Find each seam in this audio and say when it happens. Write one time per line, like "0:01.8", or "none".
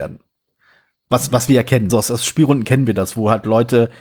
0:01.9

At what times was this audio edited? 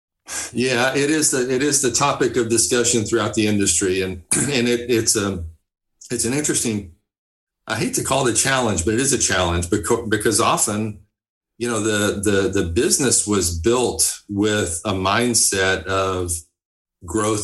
none

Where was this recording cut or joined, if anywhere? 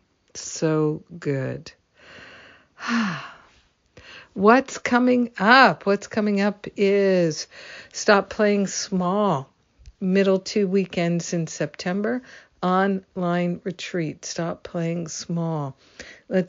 none

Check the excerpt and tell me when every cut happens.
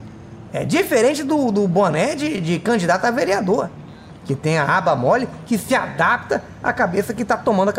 none

